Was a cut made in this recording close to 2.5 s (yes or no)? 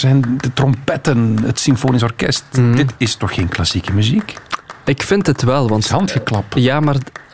no